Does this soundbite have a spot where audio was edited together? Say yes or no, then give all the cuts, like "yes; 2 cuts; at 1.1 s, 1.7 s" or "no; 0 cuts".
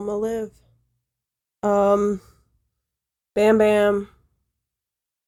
no; 0 cuts